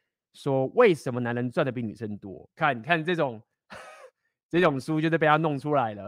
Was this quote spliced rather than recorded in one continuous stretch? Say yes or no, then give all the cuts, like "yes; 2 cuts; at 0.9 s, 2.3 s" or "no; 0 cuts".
no; 0 cuts